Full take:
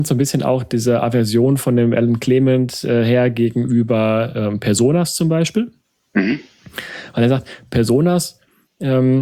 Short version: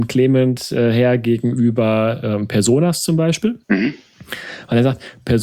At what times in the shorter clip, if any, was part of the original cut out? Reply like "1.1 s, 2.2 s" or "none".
3.6 s